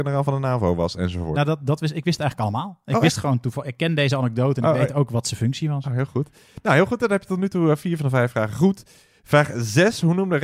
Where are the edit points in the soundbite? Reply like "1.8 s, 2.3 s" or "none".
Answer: 1.3 s